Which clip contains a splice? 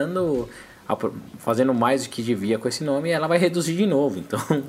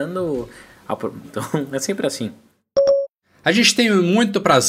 second; 1 cut; at 1.2 s

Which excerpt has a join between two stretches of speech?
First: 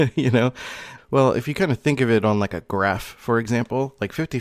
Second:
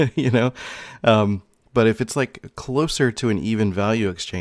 first; 1 cut; at 1.0 s

